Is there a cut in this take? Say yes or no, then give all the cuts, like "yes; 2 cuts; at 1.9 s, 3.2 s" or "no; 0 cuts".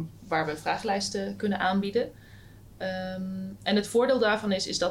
no; 0 cuts